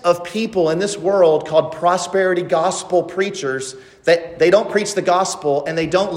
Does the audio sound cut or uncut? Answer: uncut